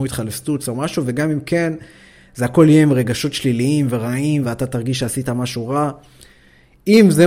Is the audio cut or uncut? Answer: cut